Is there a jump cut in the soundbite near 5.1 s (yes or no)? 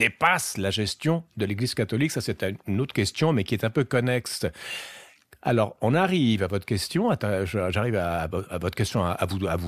no